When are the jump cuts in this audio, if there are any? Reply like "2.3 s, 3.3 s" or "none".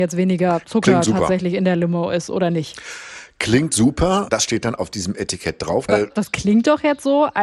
4.3 s, 5.9 s